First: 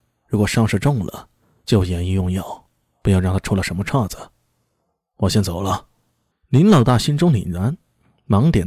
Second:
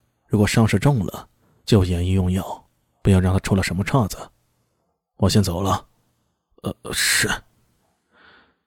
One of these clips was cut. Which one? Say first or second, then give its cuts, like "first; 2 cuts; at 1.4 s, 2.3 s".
first; 1 cut; at 6.3 s